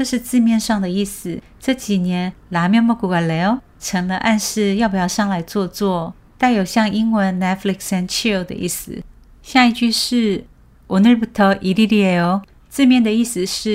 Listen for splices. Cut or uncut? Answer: uncut